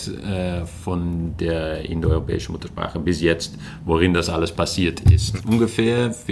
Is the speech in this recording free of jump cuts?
no; 1 cut; at 5.4 s

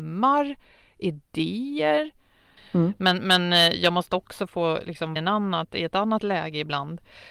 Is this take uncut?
no; 2 cuts; at 2.6 s, 5.2 s

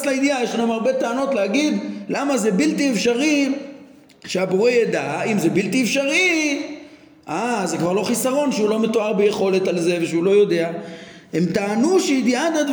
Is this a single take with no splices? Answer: yes; 0 cuts

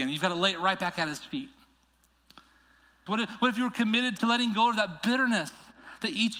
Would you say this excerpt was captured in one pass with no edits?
no; 2 cuts; at 3.1 s, 4.2 s

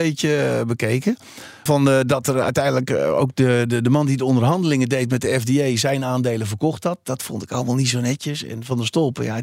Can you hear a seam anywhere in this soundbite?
yes; 1 cut; at 1.7 s

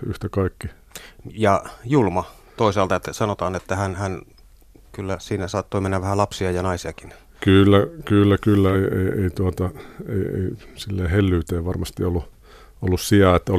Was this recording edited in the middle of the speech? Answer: no; 0 cuts

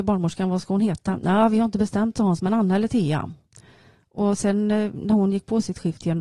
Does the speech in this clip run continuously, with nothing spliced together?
yes; 0 cuts

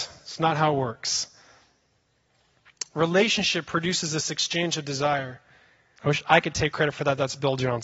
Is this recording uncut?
no; 1 cut; at 6.0 s

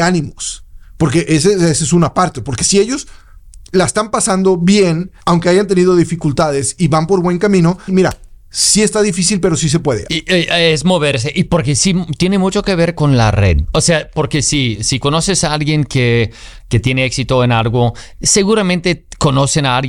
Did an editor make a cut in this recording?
yes; 3 cuts; at 5.2 s, 7.9 s, 10.1 s

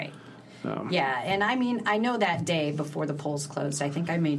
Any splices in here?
no; 0 cuts

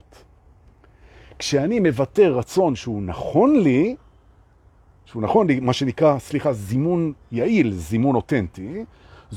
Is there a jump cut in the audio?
no; 0 cuts

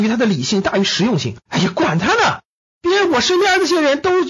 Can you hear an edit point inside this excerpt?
yes; 1 cut; at 1.4 s

